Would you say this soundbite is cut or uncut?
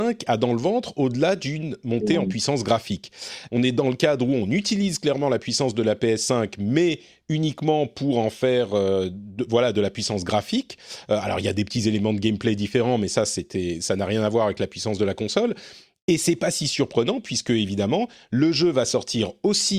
cut